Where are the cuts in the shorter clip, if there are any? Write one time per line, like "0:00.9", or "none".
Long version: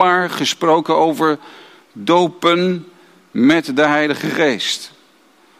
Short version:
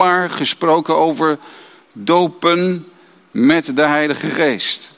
none